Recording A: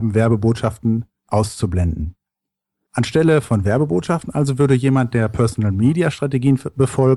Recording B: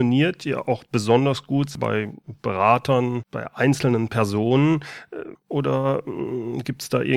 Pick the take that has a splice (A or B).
B